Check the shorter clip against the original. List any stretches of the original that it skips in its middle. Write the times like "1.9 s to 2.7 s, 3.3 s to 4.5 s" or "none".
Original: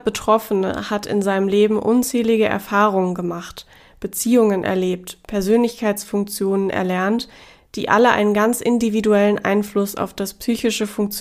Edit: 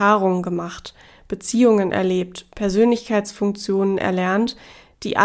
none